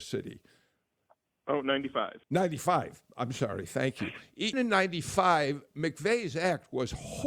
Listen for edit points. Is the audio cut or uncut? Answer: cut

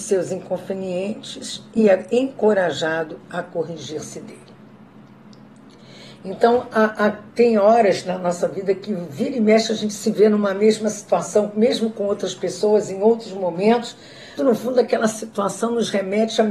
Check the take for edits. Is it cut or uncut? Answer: cut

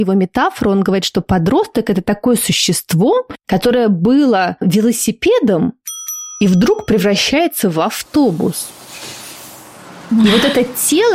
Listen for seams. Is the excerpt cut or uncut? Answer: uncut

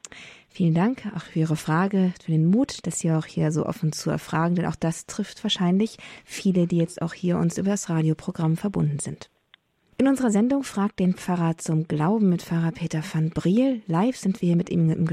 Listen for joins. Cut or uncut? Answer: uncut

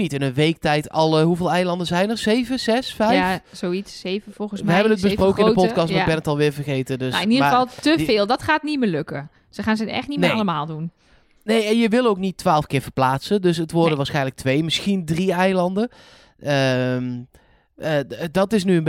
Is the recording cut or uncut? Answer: uncut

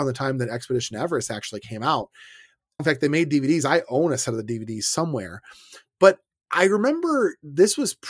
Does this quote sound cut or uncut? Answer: cut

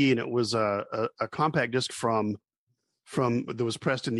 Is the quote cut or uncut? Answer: uncut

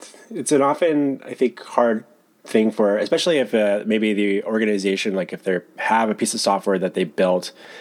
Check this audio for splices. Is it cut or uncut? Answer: uncut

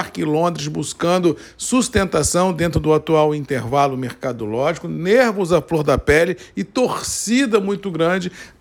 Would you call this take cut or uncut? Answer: uncut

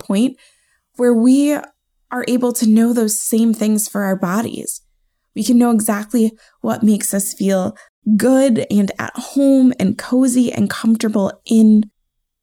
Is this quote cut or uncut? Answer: uncut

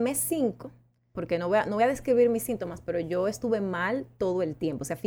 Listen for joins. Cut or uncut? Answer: cut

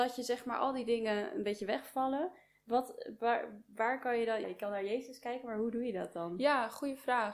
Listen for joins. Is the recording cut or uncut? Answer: cut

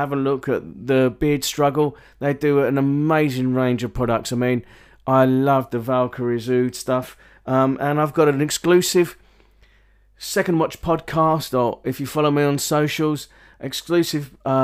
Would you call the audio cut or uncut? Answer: uncut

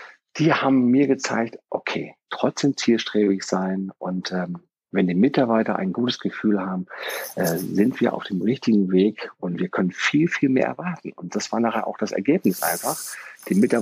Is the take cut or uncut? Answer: cut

